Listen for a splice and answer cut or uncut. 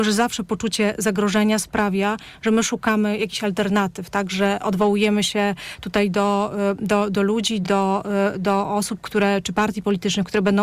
uncut